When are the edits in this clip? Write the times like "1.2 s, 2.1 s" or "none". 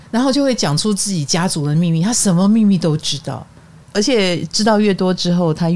none